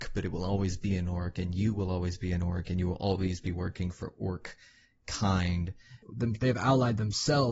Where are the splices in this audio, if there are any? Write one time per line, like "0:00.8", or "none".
0:06.0